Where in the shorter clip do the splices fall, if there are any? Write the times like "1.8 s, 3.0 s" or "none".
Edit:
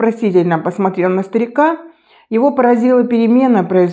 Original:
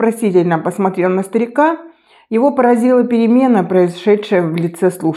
none